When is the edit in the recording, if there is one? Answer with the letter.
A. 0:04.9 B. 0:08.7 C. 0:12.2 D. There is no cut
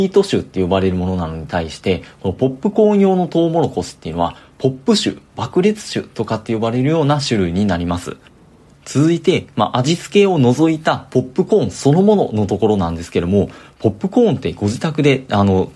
B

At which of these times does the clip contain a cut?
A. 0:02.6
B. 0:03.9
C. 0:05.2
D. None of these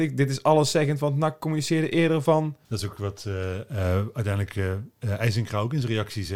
A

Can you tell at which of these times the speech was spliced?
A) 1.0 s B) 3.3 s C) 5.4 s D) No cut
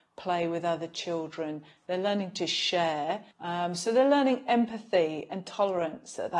B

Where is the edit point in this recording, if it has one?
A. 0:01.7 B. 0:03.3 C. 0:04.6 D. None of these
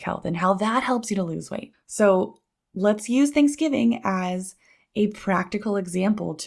A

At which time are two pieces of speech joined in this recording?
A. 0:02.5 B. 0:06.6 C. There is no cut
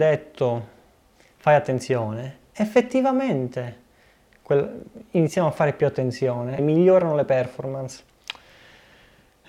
B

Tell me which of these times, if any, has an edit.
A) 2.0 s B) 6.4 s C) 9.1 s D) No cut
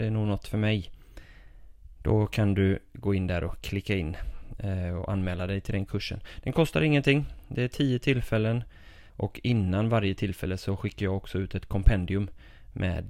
C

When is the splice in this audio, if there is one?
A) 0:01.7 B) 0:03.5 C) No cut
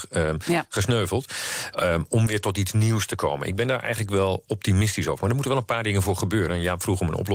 A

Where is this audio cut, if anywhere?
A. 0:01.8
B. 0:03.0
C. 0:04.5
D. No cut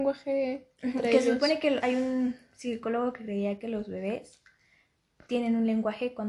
A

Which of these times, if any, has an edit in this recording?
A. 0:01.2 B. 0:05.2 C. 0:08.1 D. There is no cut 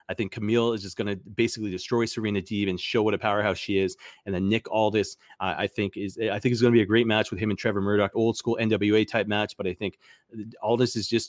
C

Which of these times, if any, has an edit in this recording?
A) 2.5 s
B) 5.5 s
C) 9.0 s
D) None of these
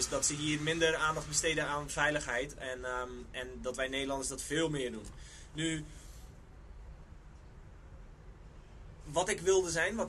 D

